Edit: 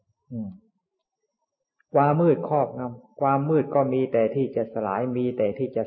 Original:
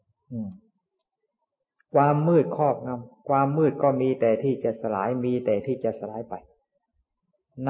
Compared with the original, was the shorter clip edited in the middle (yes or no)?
yes